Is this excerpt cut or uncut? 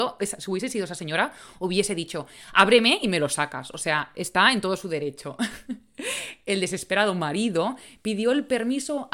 uncut